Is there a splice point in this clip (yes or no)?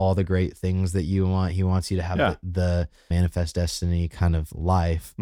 yes